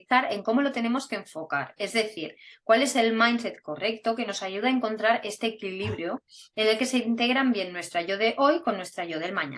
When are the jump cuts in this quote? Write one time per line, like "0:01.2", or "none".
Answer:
none